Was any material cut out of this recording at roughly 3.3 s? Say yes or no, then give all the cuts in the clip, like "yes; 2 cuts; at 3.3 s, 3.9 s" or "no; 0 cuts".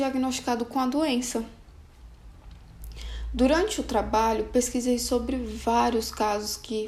no; 0 cuts